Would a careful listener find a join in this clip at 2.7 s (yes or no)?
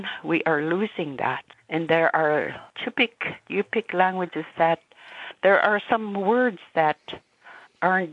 yes